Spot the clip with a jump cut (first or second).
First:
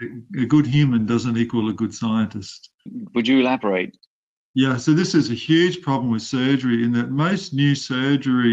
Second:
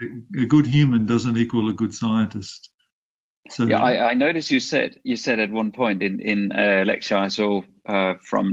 first